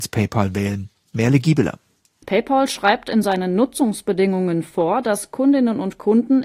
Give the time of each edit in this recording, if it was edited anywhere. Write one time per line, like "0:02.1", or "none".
0:02.2